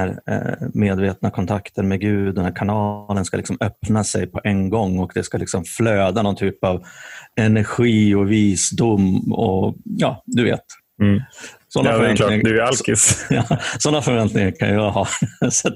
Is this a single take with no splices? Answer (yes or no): yes